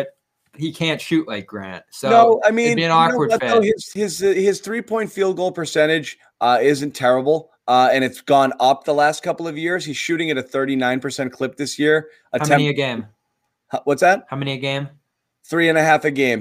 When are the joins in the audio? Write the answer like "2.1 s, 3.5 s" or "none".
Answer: none